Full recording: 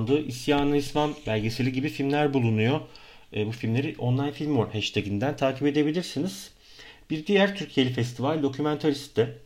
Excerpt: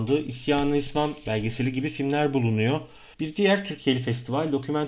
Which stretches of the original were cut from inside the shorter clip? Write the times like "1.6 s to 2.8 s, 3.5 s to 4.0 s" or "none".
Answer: 3.1 s to 7.0 s